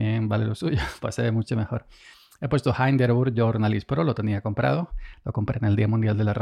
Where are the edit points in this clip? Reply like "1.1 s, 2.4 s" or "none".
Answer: none